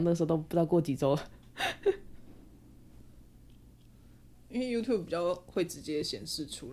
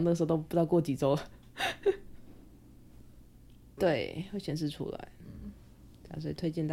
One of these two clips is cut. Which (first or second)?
second